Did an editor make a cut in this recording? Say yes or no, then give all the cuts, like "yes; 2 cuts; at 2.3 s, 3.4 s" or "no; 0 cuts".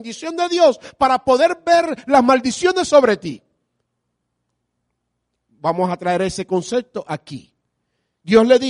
no; 0 cuts